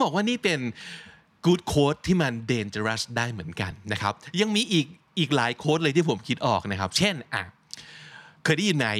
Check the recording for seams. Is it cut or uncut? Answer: uncut